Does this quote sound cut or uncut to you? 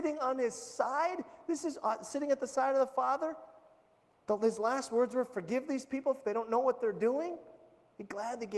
uncut